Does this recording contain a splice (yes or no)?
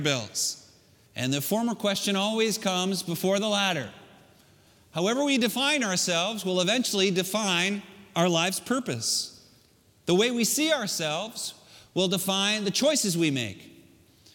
yes